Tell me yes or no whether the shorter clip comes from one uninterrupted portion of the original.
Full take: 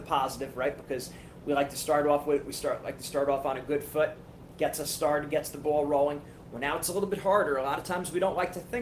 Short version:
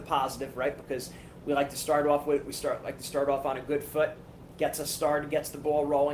yes